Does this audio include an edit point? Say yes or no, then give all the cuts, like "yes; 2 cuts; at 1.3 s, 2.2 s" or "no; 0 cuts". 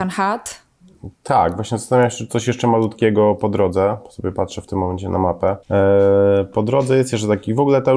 yes; 1 cut; at 5.6 s